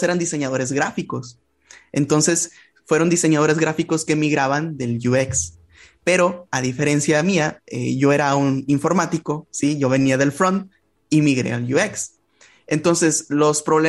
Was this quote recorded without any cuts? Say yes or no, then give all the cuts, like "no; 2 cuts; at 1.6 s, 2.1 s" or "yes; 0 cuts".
yes; 0 cuts